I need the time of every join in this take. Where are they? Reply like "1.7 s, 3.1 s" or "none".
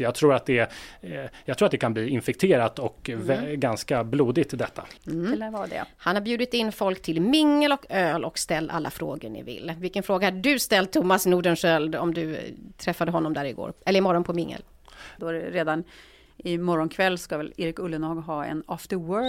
5.0 s, 15.2 s